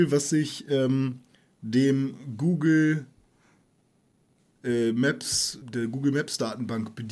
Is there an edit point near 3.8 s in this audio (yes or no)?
no